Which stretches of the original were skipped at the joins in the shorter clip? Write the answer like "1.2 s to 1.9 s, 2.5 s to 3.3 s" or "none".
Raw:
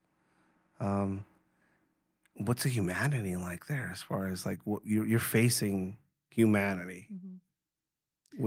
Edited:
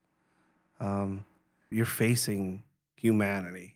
1.7 s to 5.1 s